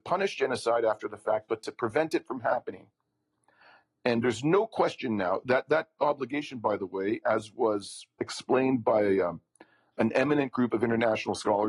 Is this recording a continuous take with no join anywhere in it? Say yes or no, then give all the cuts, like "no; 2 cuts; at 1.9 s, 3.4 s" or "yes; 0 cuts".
yes; 0 cuts